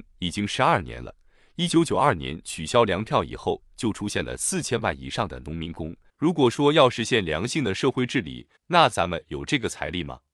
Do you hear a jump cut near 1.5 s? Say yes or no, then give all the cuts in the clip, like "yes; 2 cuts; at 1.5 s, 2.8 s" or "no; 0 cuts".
no; 2 cuts; at 6.1 s, 8.6 s